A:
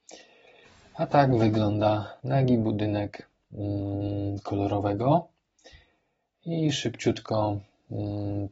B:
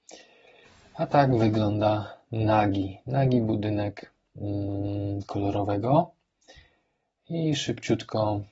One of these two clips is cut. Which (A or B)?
A